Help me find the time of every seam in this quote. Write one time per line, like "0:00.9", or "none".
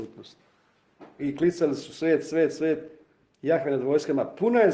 0:01.2